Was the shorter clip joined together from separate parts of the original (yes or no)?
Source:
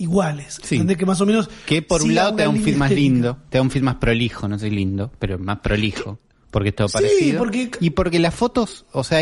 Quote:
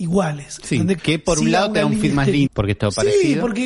yes